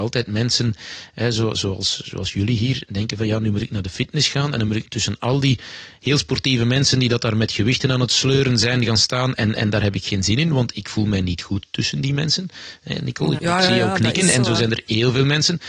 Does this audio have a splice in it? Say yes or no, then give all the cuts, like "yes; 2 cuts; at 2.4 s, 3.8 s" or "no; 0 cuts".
yes; 1 cut; at 13.4 s